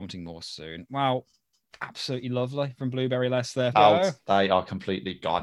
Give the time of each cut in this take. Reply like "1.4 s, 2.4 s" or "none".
3.7 s